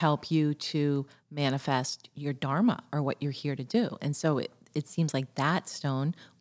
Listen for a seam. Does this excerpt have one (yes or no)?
no